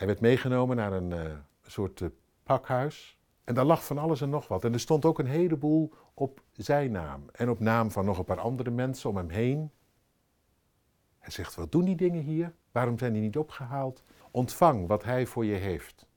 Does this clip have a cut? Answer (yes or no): yes